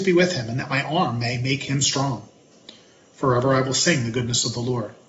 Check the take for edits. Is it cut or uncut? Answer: uncut